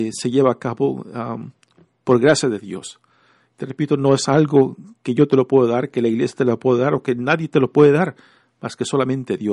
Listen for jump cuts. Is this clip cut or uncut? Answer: uncut